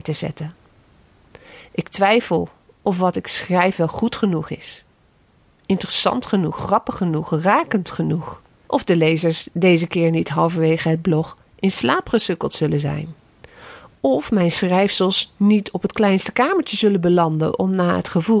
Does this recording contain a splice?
no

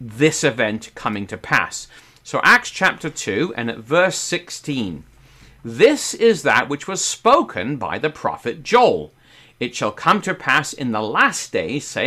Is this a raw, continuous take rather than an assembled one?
yes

